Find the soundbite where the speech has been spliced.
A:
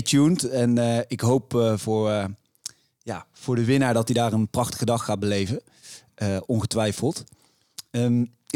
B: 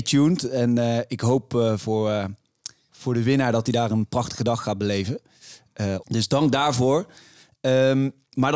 B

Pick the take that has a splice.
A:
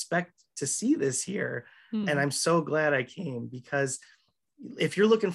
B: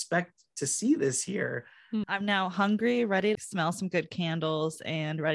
B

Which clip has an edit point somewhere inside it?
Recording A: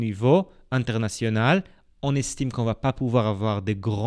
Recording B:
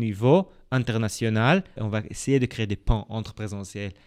B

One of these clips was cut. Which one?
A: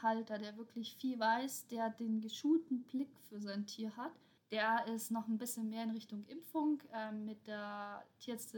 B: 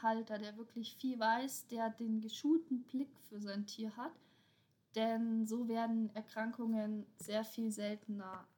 A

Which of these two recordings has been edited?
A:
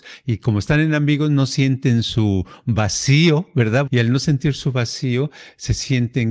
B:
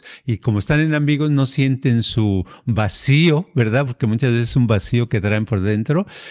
A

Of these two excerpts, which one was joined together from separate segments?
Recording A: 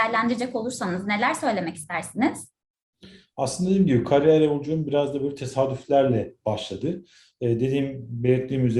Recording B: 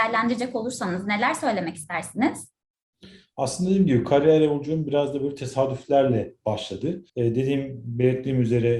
B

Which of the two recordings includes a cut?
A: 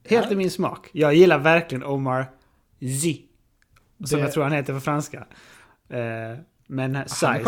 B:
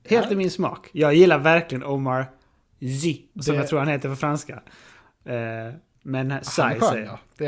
B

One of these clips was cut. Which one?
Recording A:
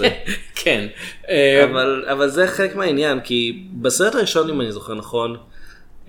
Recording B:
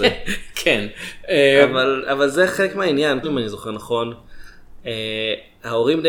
B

